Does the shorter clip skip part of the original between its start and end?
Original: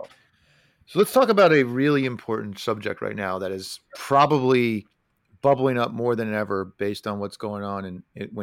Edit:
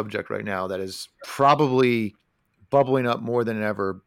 no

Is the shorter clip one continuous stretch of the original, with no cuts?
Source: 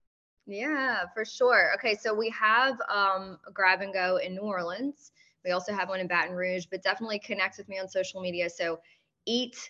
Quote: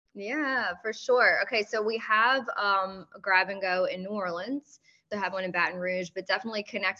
no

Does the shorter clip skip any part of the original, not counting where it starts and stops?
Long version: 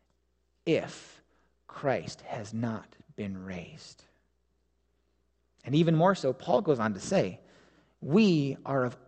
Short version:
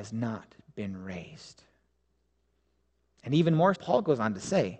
yes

